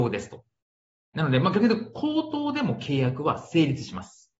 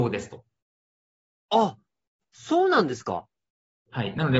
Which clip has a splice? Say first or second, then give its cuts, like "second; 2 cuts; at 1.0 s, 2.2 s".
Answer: first; 1 cut; at 1.1 s